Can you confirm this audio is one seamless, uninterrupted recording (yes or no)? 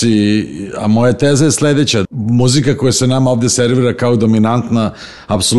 no